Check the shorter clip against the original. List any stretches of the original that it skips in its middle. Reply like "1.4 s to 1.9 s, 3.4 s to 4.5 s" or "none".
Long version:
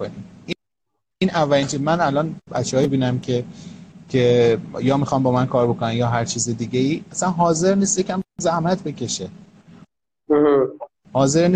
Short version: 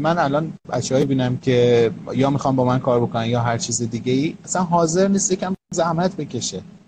3.2 s to 4.0 s